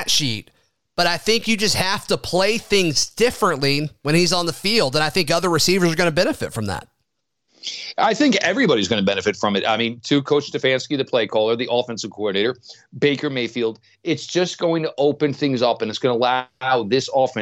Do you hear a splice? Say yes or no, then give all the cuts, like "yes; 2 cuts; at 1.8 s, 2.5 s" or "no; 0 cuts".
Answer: no; 0 cuts